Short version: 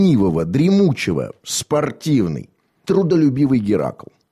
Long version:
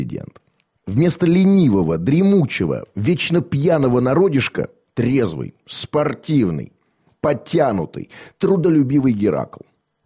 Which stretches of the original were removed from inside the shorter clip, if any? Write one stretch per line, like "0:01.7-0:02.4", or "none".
0:02.9-0:05.6
0:07.1-0:08.4

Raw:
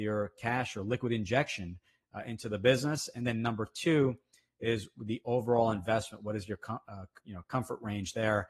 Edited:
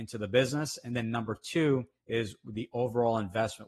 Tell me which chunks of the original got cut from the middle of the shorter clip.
0:04.3-0:04.5

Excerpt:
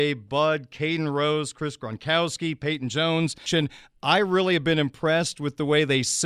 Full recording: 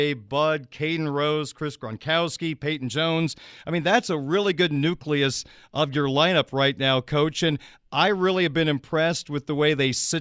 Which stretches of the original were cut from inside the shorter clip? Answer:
0:03.5-0:07.4

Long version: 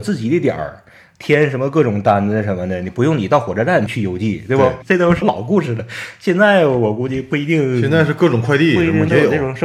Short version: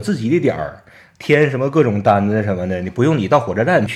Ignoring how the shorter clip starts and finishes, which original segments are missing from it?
none

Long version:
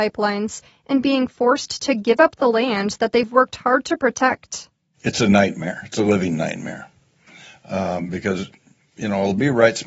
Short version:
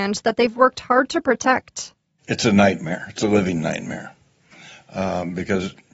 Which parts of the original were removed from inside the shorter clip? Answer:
none

